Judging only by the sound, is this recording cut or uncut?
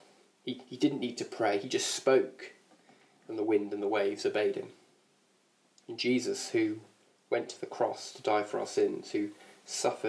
uncut